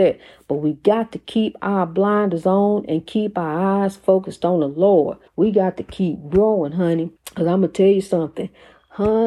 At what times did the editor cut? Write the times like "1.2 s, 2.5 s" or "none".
5.3 s, 7.2 s

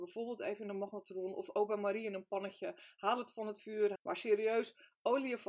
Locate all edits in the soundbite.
4.0 s

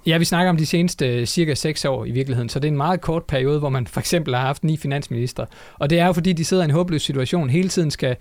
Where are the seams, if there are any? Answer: none

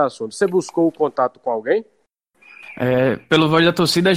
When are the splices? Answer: none

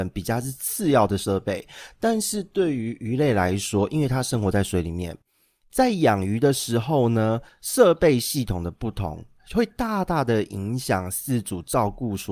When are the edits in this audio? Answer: none

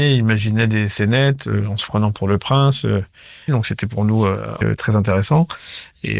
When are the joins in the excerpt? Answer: 3.5 s, 4.6 s

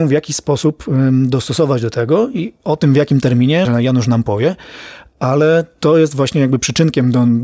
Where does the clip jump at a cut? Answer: 3.7 s

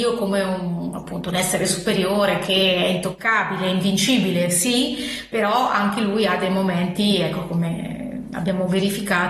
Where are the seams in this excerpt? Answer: none

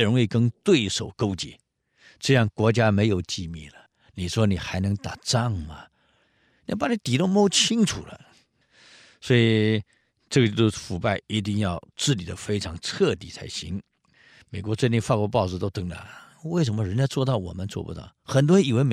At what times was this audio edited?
none

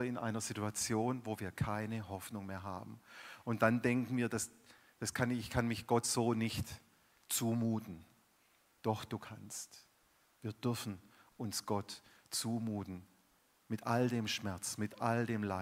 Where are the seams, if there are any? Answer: none

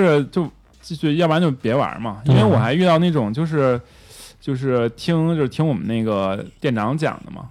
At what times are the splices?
none

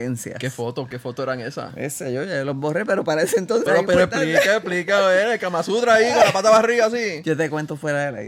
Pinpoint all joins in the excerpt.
3.7 s

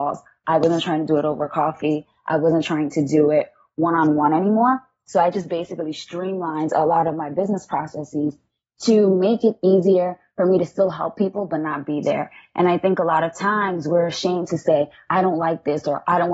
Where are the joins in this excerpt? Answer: none

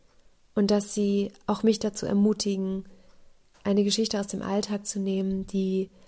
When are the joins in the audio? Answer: none

